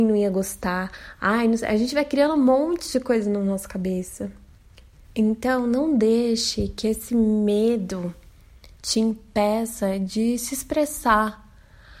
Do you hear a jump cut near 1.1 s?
no; 2 cuts; at 5.0 s, 8.7 s

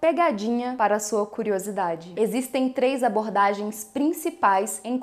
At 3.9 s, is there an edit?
no; 1 cut; at 2.1 s

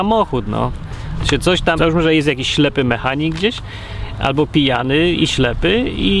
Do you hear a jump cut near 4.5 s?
no; 1 cut; at 1.8 s

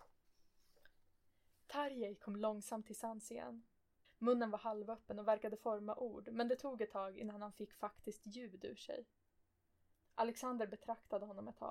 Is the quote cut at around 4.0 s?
yes; 2 cuts; at 4.0 s, 9.9 s

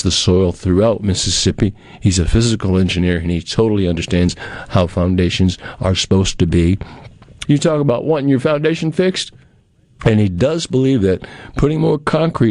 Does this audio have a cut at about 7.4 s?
yes; 2 cuts; at 7.4 s, 10.0 s

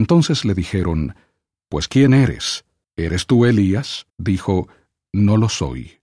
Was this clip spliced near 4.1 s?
yes; 2 cuts; at 2.8 s, 4.1 s

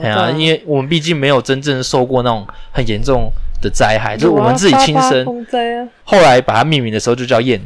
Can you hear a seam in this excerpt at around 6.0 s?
yes; 1 cut; at 6.0 s

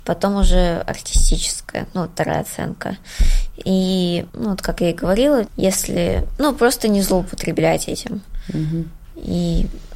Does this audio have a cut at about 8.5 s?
no; 2 cuts; at 4.3 s, 5.5 s

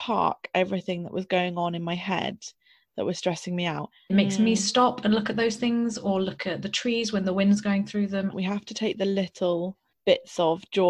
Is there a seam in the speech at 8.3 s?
yes; 2 cuts; at 4.1 s, 8.3 s

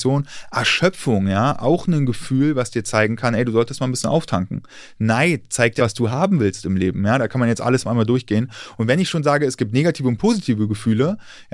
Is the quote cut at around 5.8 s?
yes; 1 cut; at 5.8 s

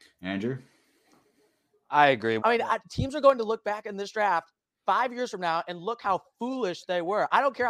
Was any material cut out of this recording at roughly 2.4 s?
yes; 1 cut; at 2.4 s

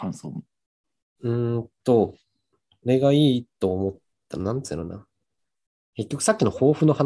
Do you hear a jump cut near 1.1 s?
no; 0 cuts

